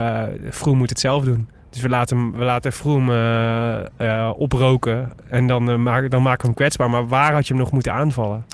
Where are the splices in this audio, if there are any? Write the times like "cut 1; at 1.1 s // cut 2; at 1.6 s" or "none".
none